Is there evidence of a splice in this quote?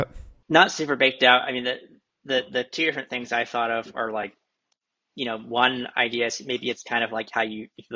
no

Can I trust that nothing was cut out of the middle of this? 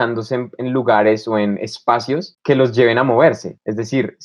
yes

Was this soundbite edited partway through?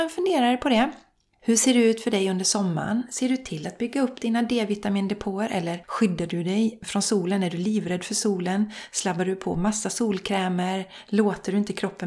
no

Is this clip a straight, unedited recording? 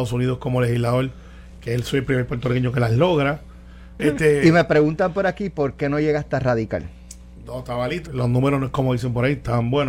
no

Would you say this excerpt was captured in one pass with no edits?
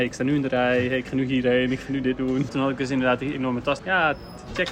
no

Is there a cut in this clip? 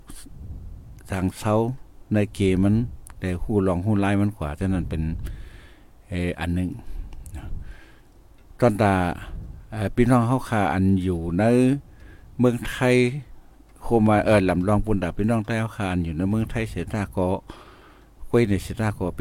no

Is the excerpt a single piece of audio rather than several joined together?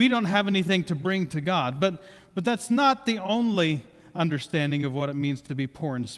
yes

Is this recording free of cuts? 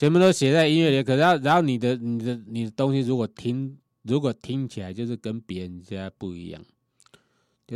yes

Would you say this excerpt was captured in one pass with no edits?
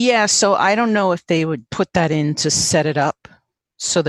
no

